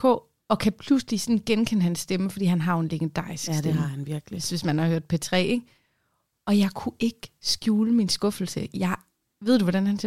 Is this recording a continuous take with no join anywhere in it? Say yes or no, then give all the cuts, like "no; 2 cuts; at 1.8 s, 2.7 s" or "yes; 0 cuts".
yes; 0 cuts